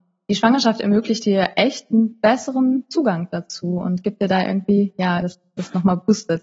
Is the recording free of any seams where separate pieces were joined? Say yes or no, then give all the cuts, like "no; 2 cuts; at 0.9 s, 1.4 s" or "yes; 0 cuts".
no; 1 cut; at 5.2 s